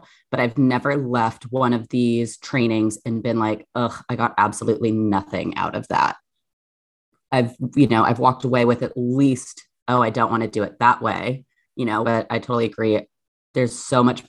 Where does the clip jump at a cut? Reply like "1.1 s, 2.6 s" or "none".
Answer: 12.0 s